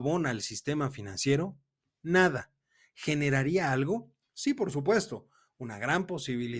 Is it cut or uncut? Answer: uncut